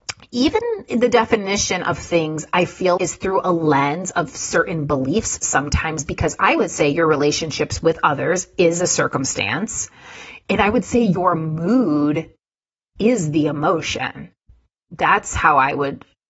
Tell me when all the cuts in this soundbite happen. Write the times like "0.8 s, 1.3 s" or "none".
3.0 s